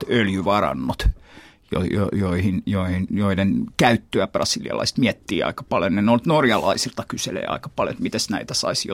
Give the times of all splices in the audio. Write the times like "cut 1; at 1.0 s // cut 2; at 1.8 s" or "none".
none